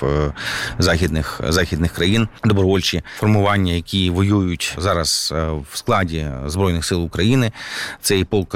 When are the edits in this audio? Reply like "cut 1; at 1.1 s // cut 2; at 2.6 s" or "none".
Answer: cut 1; at 2.4 s